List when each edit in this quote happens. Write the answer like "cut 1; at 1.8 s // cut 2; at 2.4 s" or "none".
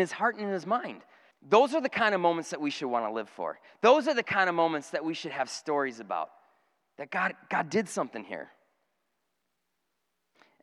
cut 1; at 1.3 s